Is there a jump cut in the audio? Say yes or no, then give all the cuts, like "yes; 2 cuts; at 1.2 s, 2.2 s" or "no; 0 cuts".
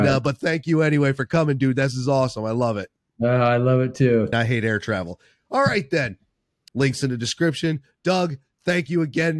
yes; 2 cuts; at 4.3 s, 6.7 s